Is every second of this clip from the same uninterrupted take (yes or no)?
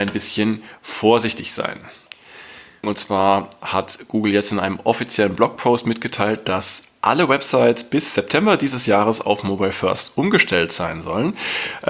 no